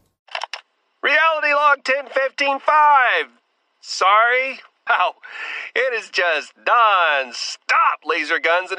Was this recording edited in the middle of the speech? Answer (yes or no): yes